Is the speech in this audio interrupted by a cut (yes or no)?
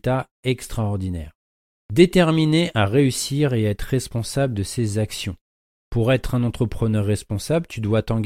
no